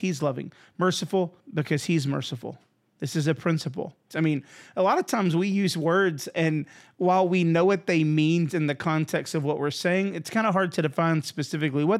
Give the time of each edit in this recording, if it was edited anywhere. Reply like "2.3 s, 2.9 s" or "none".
4.1 s, 8.5 s